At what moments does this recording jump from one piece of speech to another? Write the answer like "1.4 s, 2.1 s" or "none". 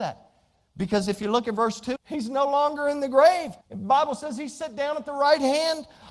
2.0 s, 3.6 s